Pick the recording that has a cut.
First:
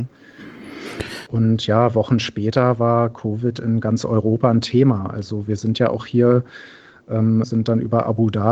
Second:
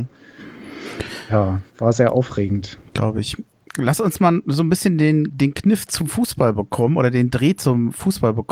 first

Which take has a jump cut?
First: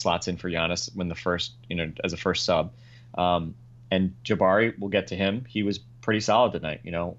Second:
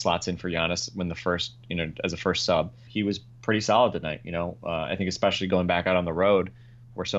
second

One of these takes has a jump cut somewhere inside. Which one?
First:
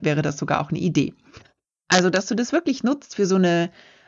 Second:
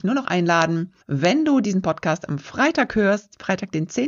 second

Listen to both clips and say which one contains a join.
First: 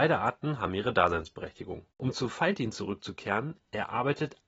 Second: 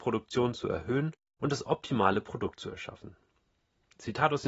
first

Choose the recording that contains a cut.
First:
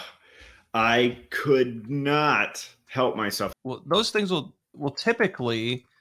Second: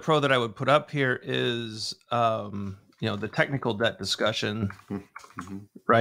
first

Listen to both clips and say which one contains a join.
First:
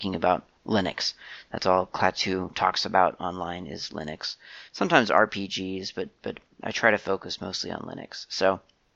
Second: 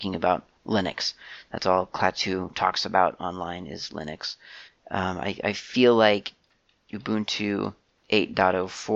second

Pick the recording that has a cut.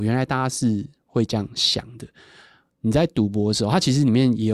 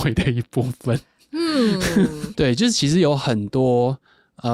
second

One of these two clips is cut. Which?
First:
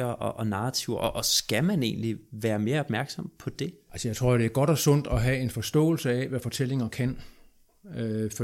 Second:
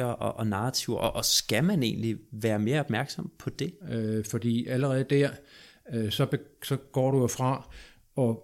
second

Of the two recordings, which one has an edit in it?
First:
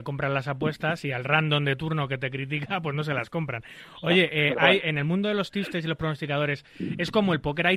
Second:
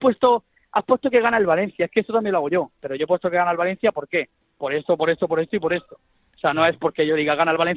second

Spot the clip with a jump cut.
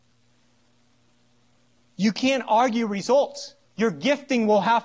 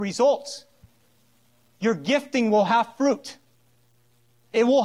first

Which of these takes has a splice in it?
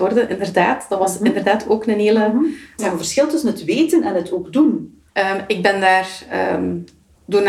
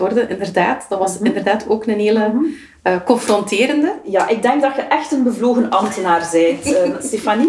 first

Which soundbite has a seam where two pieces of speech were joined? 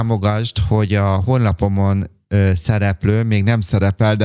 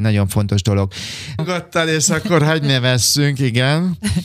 second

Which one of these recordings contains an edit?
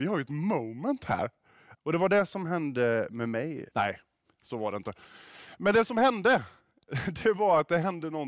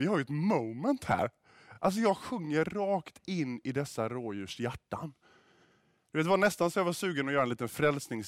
first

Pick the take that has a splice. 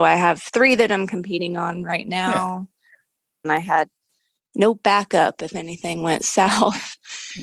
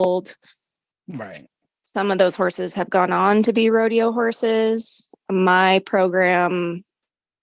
first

